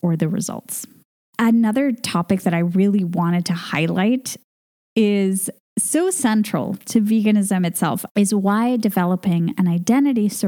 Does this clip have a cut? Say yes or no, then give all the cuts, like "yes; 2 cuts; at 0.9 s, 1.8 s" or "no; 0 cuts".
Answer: yes; 2 cuts; at 1.2 s, 8.1 s